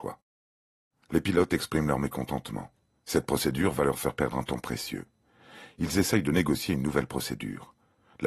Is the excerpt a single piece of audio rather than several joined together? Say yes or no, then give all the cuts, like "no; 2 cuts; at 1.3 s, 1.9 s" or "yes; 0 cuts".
yes; 0 cuts